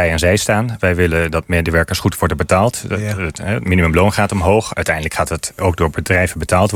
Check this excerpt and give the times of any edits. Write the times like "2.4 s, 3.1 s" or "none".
none